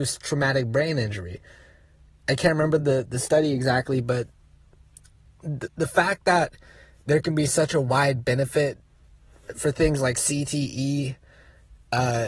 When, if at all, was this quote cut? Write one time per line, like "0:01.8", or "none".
none